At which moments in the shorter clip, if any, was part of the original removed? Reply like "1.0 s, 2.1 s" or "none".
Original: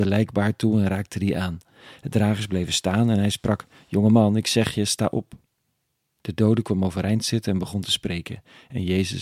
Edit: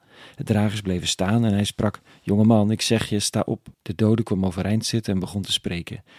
3.7 s